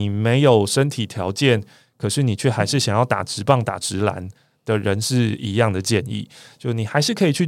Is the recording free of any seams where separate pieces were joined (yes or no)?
yes